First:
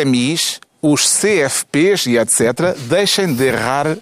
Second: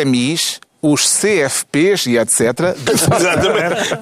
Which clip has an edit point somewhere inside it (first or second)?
second